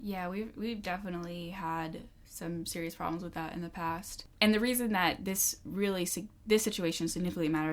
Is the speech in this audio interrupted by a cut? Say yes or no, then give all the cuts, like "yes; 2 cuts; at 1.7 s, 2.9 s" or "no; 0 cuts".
no; 0 cuts